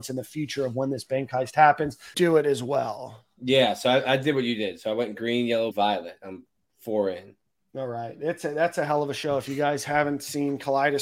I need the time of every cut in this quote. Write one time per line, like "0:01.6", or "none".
0:02.1
0:05.7